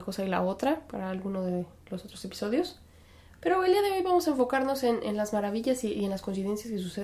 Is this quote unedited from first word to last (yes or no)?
yes